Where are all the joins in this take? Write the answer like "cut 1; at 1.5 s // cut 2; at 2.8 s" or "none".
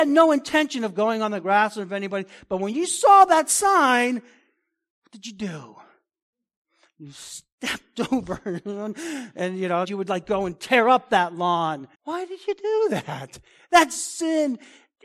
cut 1; at 9.8 s // cut 2; at 11.9 s